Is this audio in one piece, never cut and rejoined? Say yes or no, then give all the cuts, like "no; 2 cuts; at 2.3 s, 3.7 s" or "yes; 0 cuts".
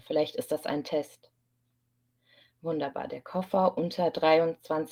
yes; 0 cuts